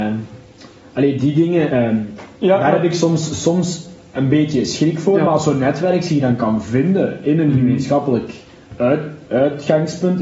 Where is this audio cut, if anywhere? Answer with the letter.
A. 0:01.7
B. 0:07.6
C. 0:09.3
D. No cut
A